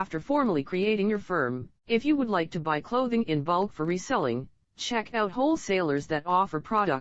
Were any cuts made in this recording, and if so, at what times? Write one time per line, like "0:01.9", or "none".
0:01.8

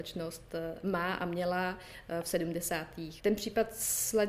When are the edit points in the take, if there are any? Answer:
0:03.2

